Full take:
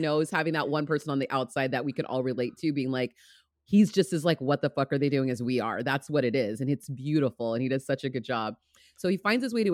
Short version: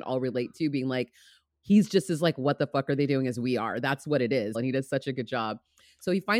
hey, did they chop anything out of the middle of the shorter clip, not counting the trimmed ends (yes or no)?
yes